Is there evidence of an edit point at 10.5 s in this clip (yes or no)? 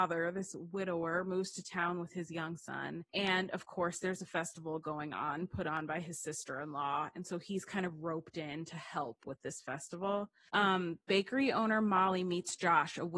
yes